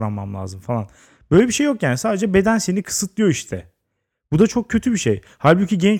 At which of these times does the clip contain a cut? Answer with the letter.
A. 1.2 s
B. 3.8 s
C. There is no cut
C